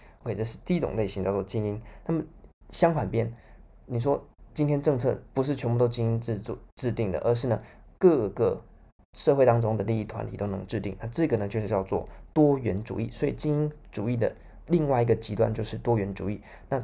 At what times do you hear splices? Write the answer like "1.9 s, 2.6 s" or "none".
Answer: none